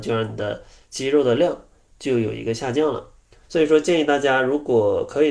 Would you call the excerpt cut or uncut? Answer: cut